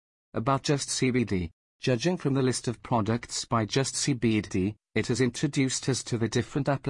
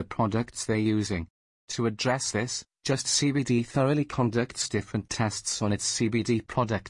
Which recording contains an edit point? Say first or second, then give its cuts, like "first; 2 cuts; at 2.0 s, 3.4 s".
first; 1 cut; at 1.7 s